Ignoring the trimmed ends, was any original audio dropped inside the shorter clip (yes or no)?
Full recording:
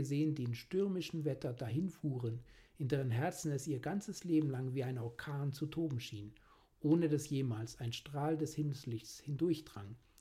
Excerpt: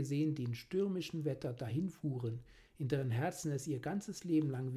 no